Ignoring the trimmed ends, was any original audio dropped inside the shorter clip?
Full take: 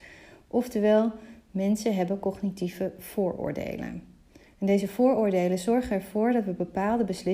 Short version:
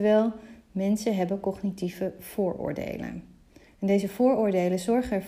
no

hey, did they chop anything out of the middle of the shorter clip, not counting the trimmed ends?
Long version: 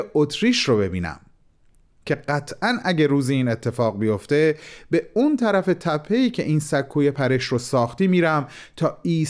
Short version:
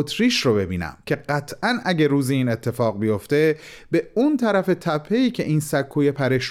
yes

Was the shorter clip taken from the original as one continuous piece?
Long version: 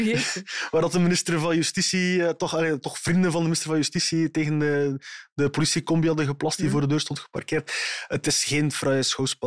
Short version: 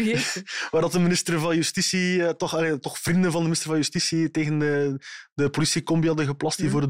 yes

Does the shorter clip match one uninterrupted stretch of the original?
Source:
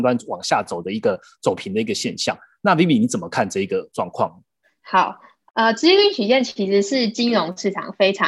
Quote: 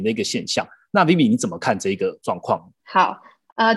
no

